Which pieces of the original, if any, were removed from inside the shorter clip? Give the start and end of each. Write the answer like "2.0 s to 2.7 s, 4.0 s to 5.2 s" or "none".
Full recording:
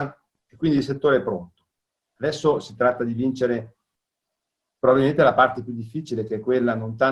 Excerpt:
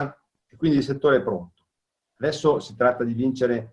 none